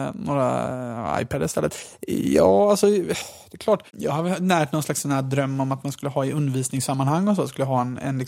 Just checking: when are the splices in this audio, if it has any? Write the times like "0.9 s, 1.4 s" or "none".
3.9 s